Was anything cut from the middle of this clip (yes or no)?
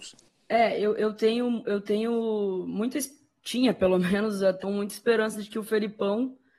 yes